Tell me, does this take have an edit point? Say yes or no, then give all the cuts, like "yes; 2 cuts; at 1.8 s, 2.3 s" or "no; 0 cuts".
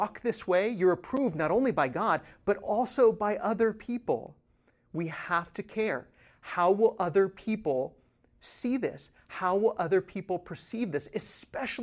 no; 0 cuts